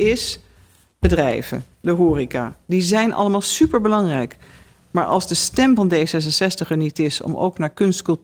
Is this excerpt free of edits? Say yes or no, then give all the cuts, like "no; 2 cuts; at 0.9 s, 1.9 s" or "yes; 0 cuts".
yes; 0 cuts